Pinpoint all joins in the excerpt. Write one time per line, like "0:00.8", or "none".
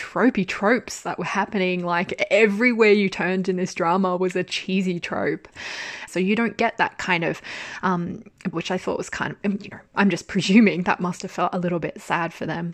0:06.1
0:08.5